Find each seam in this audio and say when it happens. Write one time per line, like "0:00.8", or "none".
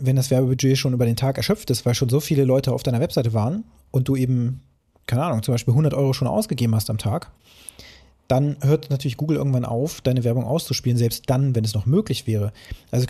none